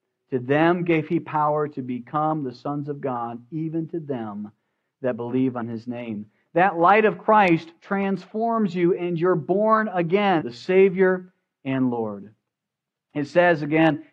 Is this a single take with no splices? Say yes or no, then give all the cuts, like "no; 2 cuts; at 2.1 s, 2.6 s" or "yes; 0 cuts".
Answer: no; 1 cut; at 10.4 s